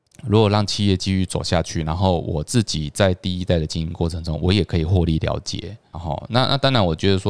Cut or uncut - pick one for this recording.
cut